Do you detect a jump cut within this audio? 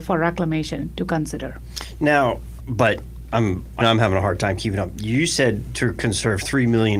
yes; 2 cuts; at 2.6 s, 3.8 s

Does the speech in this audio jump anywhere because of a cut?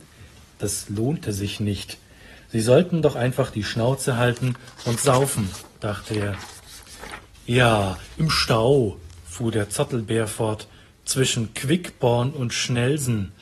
no; 0 cuts

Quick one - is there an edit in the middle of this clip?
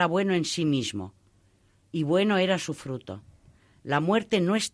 no; 0 cuts

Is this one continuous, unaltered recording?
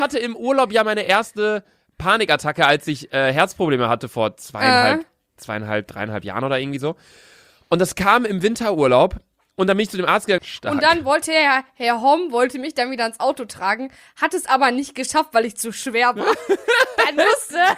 no; 1 cut; at 10.4 s

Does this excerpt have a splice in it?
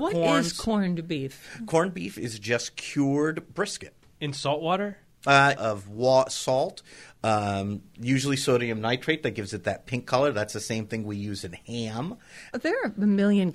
yes; 2 cuts; at 5.6 s, 12.5 s

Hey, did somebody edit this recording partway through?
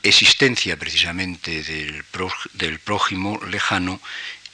no; 0 cuts

